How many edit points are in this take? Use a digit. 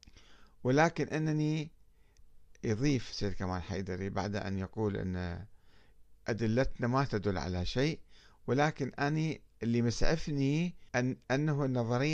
1